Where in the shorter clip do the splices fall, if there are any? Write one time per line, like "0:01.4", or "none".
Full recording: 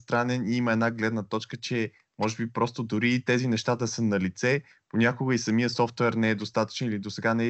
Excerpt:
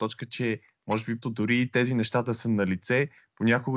0:01.2